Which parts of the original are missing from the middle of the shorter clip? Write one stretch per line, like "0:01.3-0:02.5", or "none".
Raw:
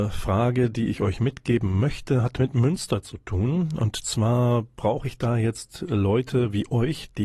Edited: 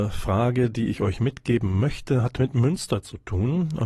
none

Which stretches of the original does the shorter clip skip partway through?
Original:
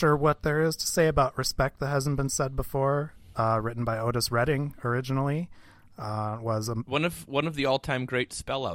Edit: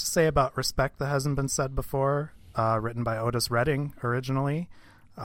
none

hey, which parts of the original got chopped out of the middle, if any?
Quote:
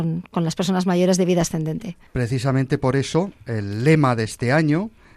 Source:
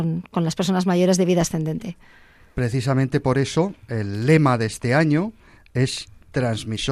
0:02.1-0:02.5

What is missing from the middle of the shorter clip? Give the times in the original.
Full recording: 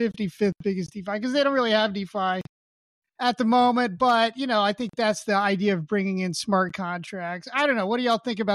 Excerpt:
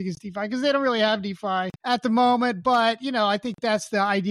0:02.5-0:03.1

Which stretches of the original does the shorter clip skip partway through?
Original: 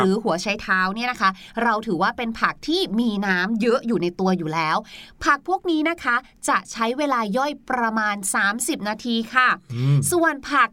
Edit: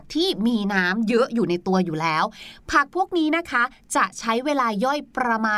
none

